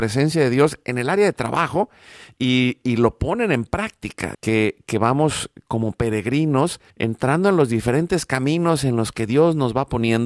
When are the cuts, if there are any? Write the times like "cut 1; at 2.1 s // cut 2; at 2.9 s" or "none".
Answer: cut 1; at 4.3 s // cut 2; at 6.9 s